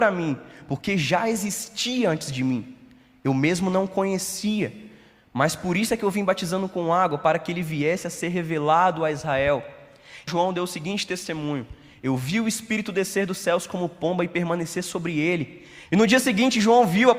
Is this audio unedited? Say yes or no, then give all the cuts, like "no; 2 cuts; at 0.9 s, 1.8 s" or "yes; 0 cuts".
no; 2 cuts; at 10.3 s, 15.9 s